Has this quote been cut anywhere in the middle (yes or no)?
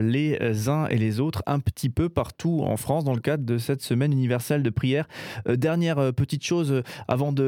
no